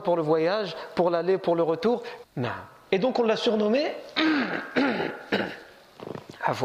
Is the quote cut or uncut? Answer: cut